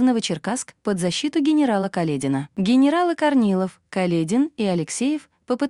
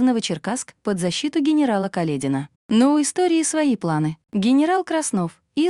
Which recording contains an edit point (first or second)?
second